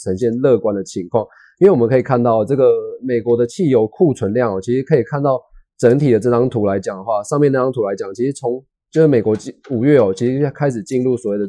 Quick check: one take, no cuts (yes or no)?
yes